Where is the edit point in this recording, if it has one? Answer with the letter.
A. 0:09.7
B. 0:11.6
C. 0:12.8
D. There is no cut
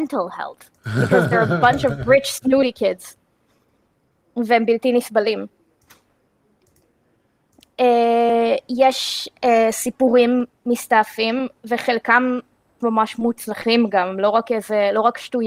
C